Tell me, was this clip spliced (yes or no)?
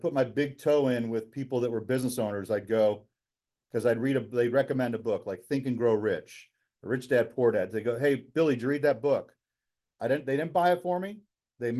no